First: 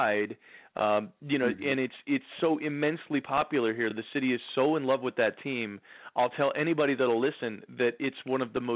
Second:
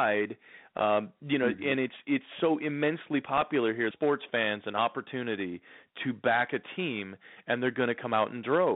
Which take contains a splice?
second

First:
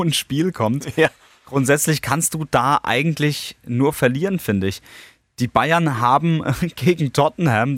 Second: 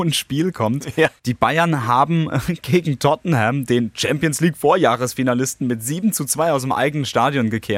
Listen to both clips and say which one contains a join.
second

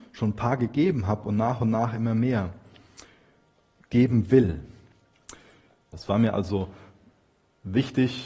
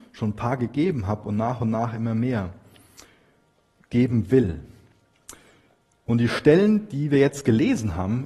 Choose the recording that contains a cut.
first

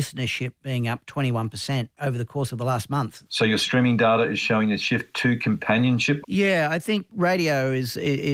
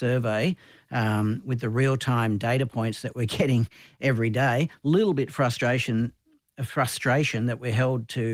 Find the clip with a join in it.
first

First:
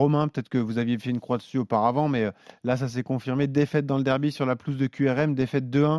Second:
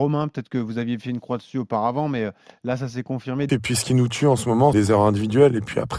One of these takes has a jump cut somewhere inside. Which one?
second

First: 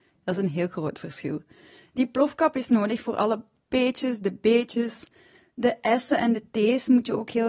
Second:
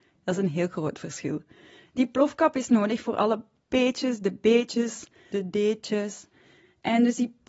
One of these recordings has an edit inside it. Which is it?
second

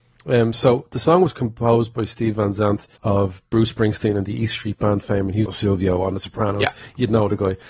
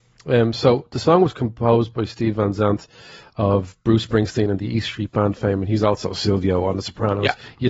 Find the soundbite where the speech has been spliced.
first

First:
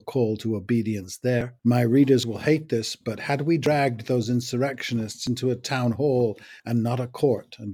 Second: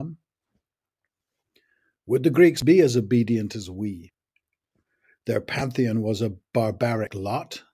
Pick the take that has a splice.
first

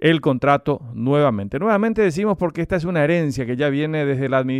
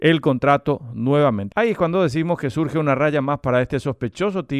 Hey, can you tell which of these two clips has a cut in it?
second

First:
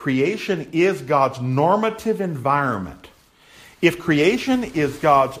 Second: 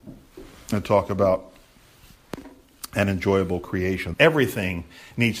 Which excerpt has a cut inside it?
second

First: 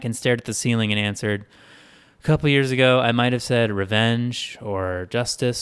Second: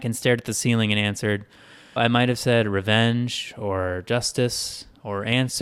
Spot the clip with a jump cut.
second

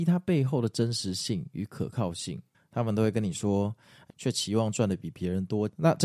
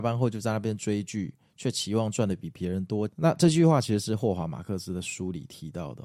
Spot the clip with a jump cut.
first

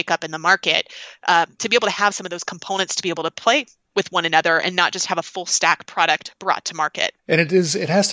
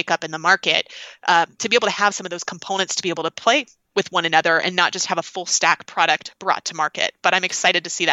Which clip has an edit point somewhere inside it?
first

